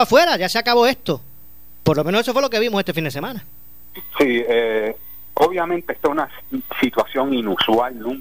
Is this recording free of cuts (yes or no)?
yes